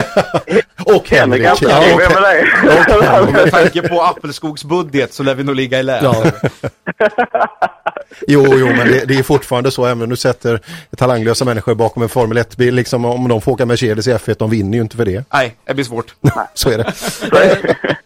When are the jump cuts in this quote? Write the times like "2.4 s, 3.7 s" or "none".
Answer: none